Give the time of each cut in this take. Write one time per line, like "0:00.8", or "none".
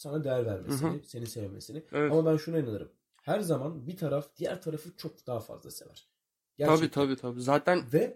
0:05.0